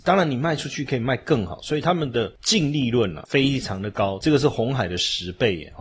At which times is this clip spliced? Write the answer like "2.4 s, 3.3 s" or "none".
4.2 s